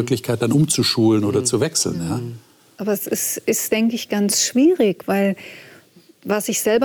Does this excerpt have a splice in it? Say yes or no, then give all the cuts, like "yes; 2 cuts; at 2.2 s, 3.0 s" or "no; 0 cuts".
no; 0 cuts